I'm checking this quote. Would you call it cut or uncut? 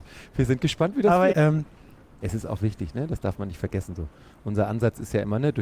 cut